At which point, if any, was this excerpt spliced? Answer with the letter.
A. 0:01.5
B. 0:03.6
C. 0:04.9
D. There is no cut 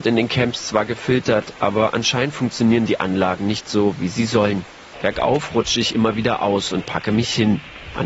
C